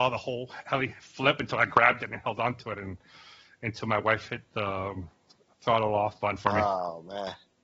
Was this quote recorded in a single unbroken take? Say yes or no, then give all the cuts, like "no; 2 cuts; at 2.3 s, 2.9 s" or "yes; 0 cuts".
yes; 0 cuts